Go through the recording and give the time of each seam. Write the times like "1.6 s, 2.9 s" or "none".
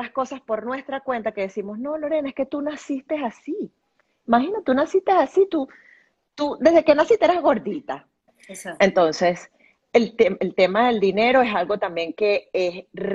8.3 s